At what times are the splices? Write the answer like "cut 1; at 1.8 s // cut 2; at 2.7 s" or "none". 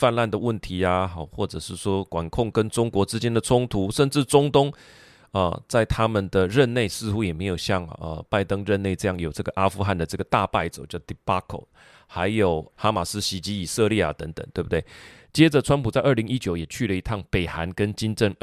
cut 1; at 15.2 s

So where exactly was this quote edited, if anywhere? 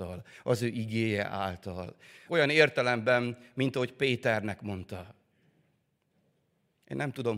cut 1; at 2.3 s

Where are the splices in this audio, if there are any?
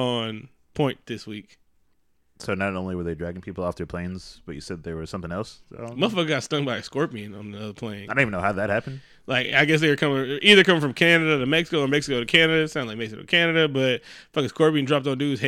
none

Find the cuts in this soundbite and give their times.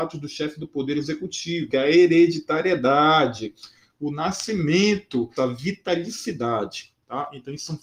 cut 1; at 1.7 s // cut 2; at 5.4 s

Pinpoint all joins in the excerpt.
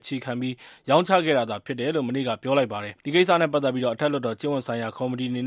cut 1; at 3.0 s

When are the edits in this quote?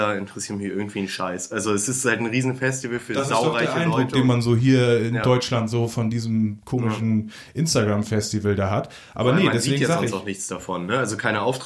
none

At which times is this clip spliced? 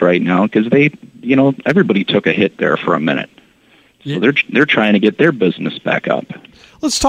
none

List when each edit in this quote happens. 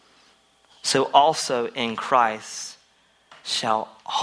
none

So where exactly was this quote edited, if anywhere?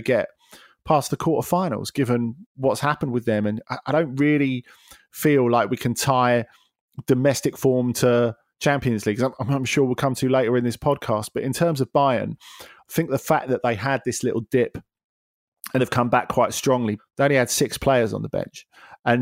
cut 1; at 15.8 s // cut 2; at 17.0 s

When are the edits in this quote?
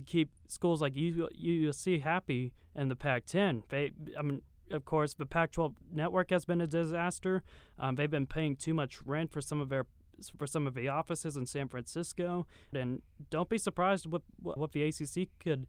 cut 1; at 12.7 s // cut 2; at 14.6 s

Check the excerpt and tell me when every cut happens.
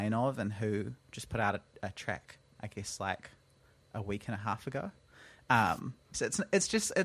cut 1; at 6.1 s

